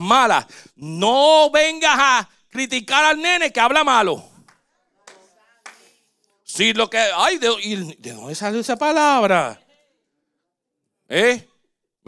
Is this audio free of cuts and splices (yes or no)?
yes